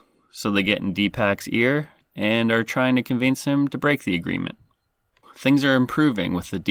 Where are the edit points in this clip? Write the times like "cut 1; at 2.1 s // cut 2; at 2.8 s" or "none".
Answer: cut 1; at 5.2 s